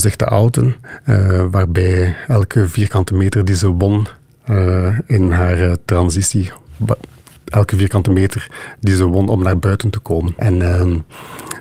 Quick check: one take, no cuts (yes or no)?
no